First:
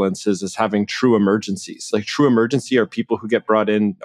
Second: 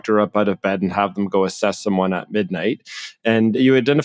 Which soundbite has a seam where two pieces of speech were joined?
first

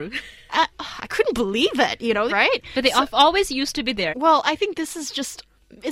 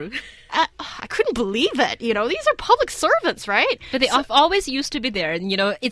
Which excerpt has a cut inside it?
first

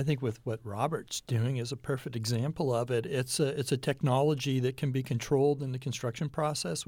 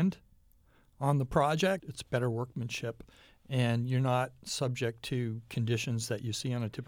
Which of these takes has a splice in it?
second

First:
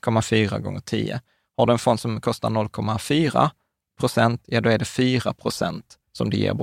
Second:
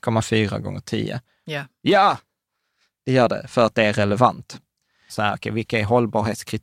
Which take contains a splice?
second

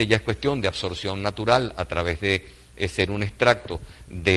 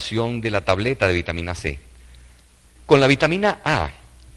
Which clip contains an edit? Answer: second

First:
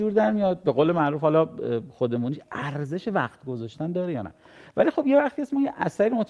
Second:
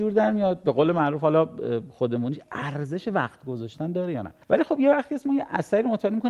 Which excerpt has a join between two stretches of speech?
second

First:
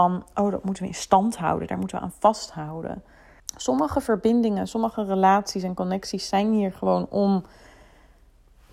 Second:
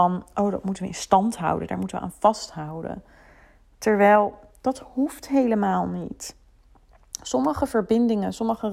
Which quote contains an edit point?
first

